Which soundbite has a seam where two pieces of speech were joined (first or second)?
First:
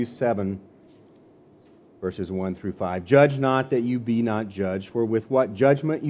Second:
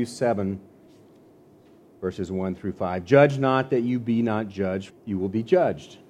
second